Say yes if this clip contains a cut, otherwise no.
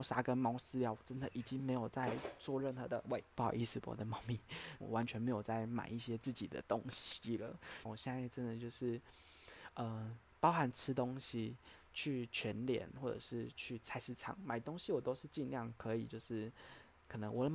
yes